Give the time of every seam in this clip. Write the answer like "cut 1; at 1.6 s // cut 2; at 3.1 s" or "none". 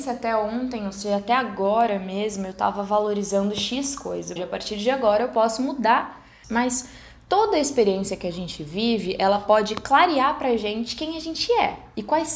cut 1; at 4.4 s // cut 2; at 6.4 s